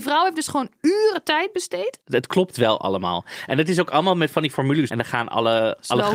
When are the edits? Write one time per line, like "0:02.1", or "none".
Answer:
0:02.0
0:04.9